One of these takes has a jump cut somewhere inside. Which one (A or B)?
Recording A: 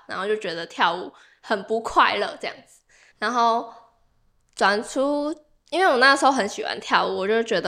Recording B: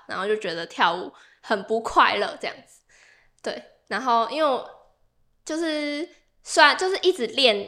A